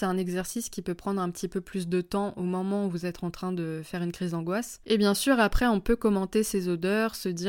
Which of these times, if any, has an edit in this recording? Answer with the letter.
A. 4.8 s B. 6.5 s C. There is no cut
A